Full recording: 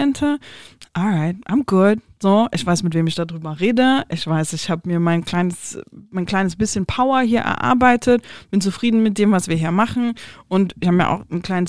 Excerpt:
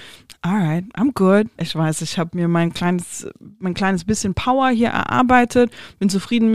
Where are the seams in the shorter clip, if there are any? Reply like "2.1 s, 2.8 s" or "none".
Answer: 1.6 s